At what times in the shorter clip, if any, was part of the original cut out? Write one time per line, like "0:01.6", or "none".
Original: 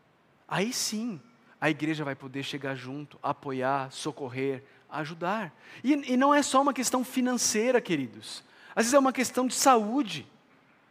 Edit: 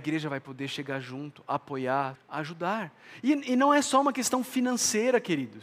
0:02.2